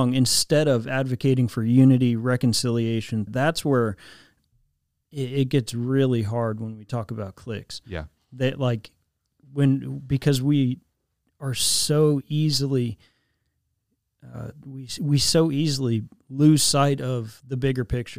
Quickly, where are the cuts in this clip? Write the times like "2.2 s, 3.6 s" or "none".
3.3 s